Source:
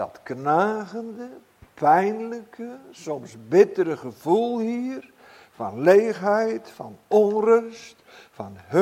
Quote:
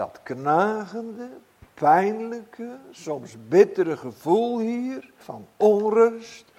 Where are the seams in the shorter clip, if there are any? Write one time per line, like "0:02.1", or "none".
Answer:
0:05.2